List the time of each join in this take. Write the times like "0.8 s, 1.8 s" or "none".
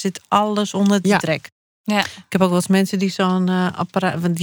none